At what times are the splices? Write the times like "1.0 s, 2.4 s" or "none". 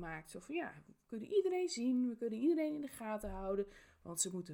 none